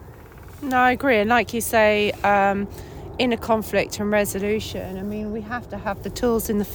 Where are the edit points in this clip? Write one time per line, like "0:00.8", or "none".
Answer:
none